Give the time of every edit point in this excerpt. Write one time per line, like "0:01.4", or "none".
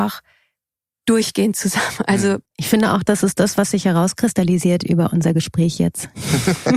0:02.5